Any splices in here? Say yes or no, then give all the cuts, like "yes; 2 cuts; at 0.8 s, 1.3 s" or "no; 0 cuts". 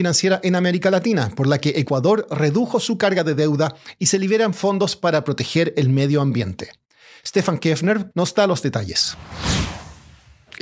yes; 1 cut; at 8.1 s